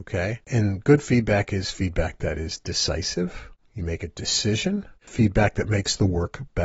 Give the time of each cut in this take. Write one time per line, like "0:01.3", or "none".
0:05.1